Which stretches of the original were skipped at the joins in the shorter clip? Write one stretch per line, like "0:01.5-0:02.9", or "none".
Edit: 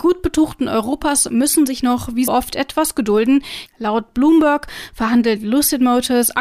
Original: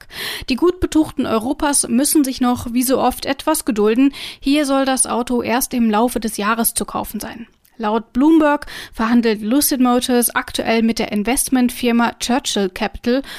0:02.9-0:03.0
0:04.4-0:07.7